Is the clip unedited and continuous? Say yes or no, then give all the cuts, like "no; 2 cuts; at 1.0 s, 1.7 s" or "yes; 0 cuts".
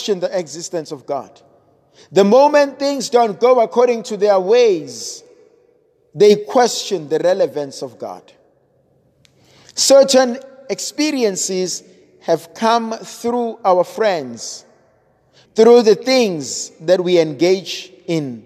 no; 1 cut; at 15.5 s